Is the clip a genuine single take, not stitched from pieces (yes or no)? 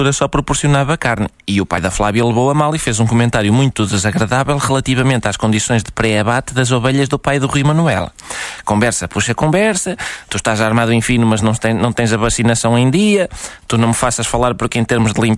yes